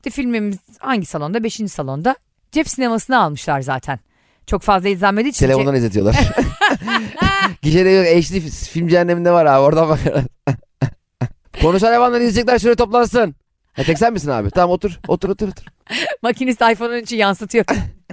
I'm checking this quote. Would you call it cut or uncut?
cut